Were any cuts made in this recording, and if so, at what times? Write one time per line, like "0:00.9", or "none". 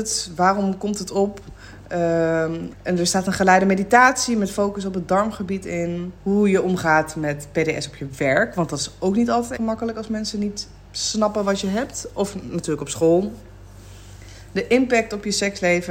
0:02.7
0:06.2
0:09.5